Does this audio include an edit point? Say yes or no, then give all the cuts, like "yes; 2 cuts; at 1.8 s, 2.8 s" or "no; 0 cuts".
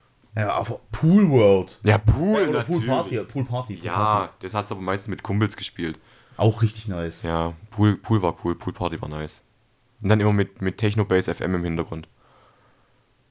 no; 0 cuts